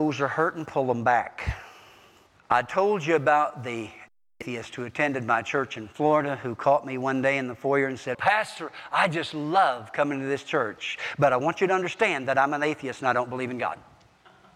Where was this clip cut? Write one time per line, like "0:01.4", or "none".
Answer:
0:08.1